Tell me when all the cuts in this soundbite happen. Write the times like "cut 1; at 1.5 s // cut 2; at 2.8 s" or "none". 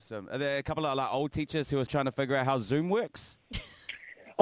cut 1; at 1.9 s